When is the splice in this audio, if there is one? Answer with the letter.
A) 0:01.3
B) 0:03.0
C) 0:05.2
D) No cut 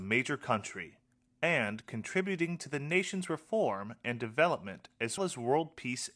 C